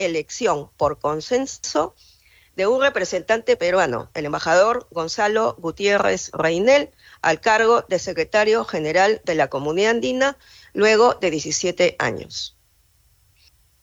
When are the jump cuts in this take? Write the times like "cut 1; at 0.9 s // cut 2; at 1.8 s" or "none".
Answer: none